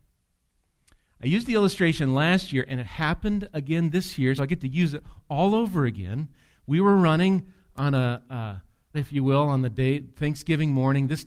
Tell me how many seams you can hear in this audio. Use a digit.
2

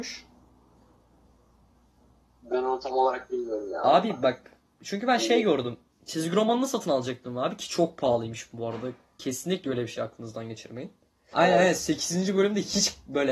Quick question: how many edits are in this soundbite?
1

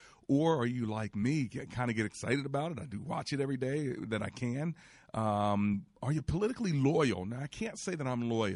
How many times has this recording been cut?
0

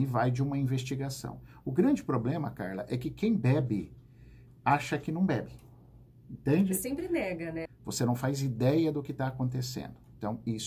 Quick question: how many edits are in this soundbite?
1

